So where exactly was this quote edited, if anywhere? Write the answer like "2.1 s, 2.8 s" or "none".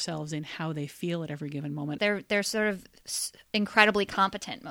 2.0 s

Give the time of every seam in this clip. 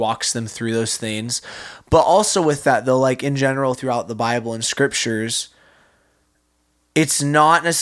none

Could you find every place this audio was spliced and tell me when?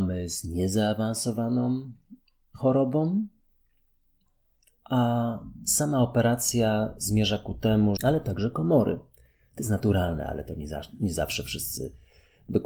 8.0 s

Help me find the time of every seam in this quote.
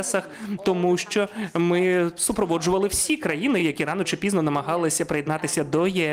none

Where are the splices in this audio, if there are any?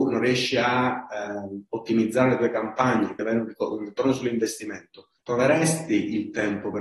3.2 s, 5.2 s

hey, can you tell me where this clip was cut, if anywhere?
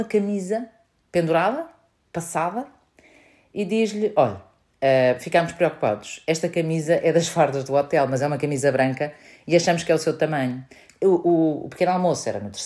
10.9 s

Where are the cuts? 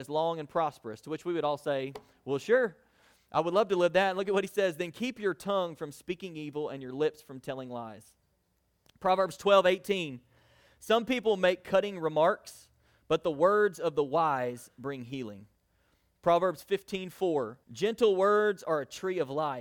17.6 s

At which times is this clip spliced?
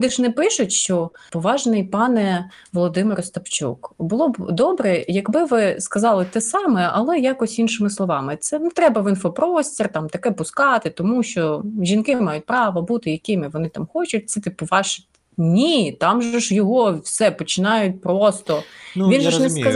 none

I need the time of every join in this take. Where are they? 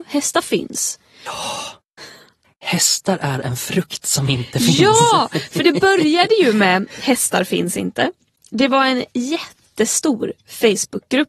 1.3 s

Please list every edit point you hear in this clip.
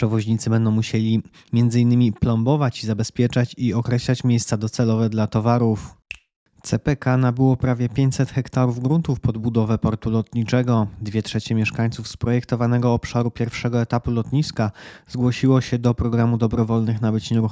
none

